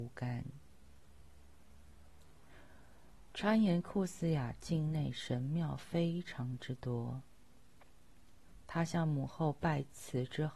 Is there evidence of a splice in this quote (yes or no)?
yes